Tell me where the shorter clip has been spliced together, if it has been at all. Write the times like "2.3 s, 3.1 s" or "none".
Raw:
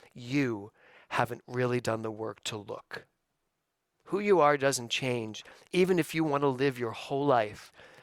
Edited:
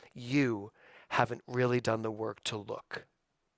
none